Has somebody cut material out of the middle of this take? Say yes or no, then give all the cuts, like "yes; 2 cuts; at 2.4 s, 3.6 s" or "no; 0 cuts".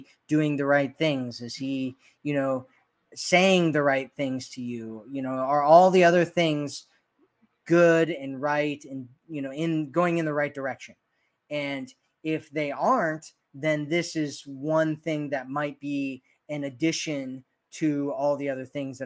no; 0 cuts